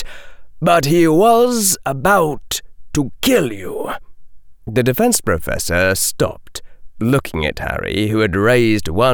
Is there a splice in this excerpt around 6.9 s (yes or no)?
no